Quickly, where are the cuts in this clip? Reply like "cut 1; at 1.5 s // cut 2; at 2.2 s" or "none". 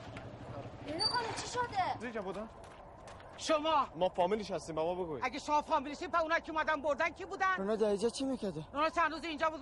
cut 1; at 2.0 s